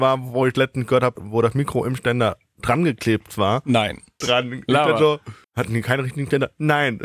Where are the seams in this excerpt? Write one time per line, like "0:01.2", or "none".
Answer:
0:01.2
0:04.2
0:05.4